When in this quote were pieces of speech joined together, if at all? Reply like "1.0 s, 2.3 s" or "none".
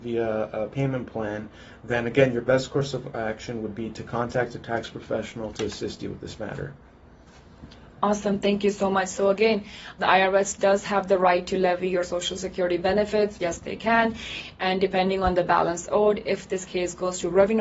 10.0 s, 13.4 s